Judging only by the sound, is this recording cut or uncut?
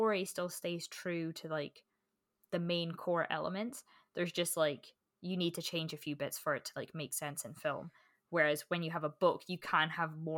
uncut